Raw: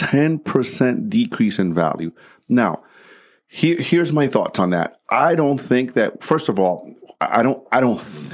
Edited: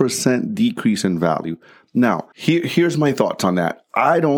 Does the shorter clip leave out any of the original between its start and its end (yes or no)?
yes